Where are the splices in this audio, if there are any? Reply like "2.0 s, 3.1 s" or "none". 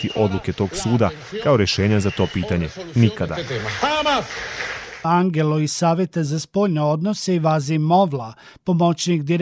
5.0 s